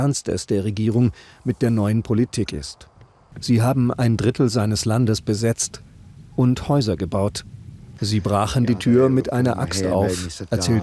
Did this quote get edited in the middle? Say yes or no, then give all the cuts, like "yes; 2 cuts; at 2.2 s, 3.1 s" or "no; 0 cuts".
yes; 2 cuts; at 3.3 s, 8.0 s